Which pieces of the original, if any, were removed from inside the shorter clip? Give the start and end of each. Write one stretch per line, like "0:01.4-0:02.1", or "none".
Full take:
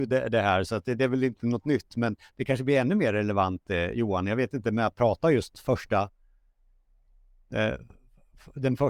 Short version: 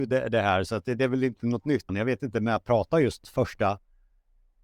0:01.9-0:04.2